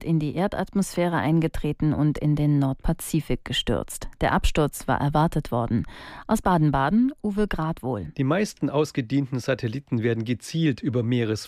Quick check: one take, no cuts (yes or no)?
yes